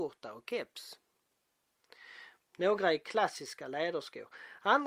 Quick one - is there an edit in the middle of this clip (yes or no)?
yes